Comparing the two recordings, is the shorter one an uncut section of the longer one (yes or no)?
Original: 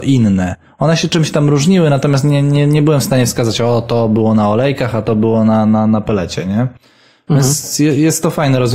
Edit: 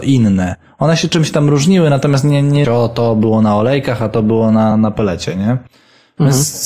no